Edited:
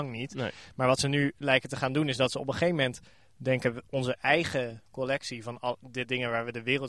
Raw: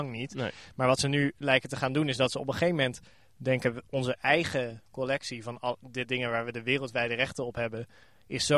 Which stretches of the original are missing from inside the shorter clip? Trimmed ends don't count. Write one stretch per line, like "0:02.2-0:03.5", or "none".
none